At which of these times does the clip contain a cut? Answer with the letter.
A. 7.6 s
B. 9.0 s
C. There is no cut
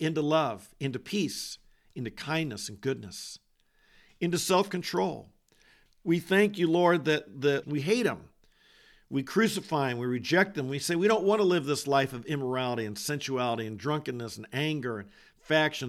A